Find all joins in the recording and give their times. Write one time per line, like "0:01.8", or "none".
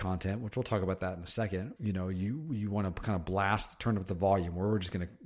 0:01.8